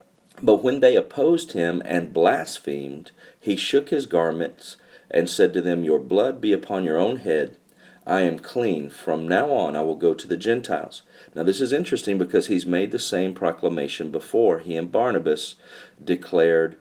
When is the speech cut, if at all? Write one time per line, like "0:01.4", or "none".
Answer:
none